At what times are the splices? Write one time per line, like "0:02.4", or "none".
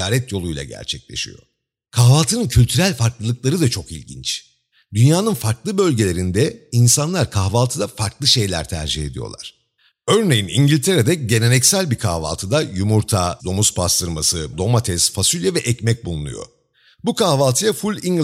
0:13.4
0:14.5